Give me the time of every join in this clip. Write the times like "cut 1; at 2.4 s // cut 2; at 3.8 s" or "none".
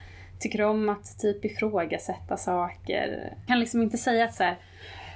cut 1; at 3.5 s